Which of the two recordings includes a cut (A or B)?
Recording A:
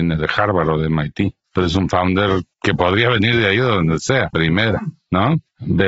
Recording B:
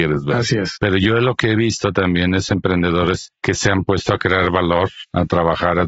A